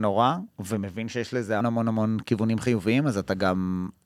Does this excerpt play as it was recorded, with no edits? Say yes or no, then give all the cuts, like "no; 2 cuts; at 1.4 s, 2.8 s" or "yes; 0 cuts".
no; 1 cut; at 1.6 s